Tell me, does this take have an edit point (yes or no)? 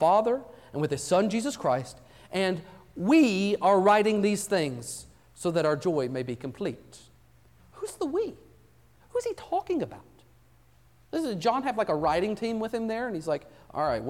no